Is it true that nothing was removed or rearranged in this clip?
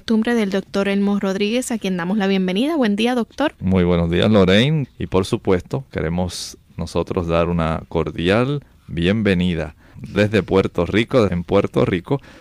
no; 3 cuts; at 4.8 s, 9.9 s, 11.3 s

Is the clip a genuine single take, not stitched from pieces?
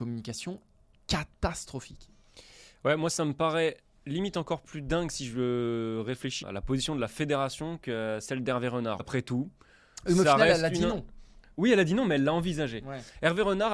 no; 2 cuts; at 6.4 s, 9.0 s

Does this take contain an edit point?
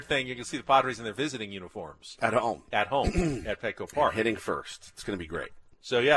no; 0 cuts

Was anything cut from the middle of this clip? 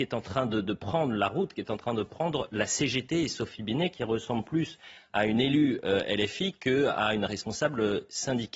no; 0 cuts

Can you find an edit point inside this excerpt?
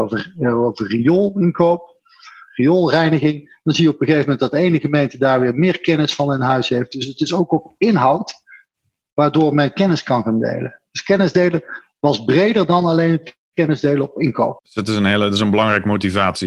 yes; 1 cut; at 14.6 s

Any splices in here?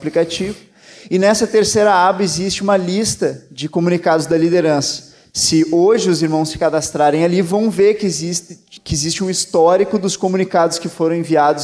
no; 0 cuts

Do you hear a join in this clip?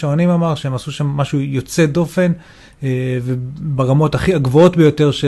no; 0 cuts

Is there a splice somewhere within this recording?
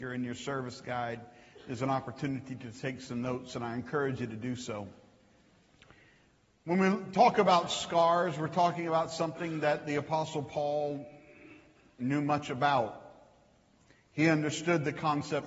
no; 0 cuts

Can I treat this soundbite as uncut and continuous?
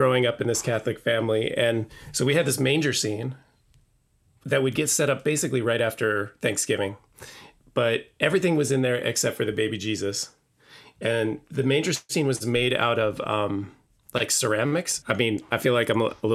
no; 1 cut; at 15.0 s

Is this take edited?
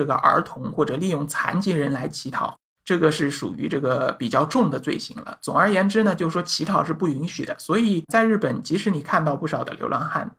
no; 0 cuts

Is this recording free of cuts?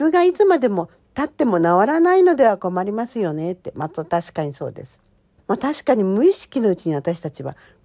no; 1 cut; at 5.4 s

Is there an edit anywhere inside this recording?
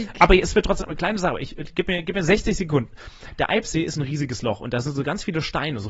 no; 0 cuts

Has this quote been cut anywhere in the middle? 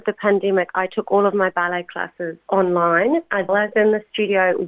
yes; 1 cut; at 3.5 s

